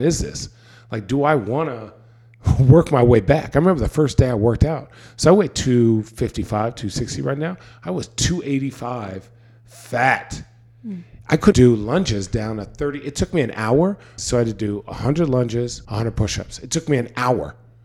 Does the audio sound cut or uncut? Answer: cut